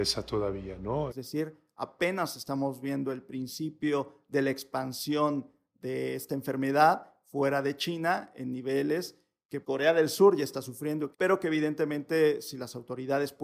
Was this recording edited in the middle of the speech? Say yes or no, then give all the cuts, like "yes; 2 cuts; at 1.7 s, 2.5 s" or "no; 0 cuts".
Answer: yes; 3 cuts; at 1.1 s, 9.6 s, 11.1 s